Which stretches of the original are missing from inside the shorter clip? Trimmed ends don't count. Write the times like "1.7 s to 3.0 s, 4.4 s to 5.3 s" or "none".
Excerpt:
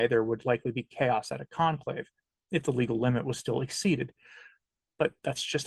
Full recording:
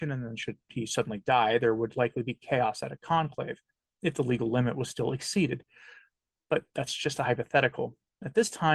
none